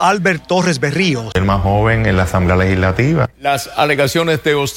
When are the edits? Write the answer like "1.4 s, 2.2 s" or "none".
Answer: 1.3 s, 3.3 s